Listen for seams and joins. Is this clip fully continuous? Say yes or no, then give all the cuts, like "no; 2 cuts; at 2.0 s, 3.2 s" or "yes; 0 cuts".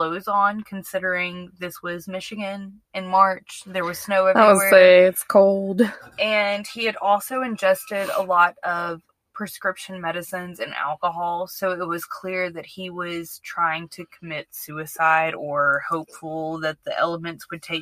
yes; 0 cuts